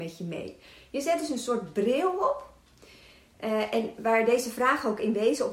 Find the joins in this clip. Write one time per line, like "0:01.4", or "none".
none